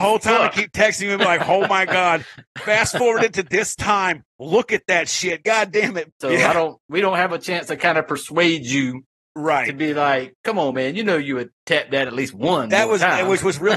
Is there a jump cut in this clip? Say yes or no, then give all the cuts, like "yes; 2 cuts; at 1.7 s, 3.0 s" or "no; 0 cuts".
yes; 1 cut; at 6.1 s